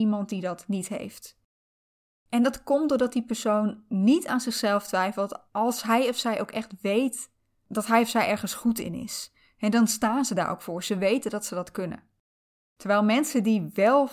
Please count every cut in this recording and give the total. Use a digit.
0